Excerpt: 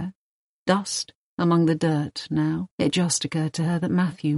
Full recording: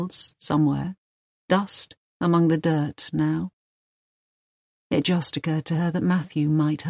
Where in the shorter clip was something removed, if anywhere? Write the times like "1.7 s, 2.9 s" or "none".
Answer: 2.7 s